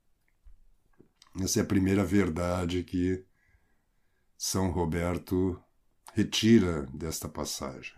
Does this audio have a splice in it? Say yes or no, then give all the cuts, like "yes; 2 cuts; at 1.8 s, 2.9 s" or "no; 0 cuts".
no; 0 cuts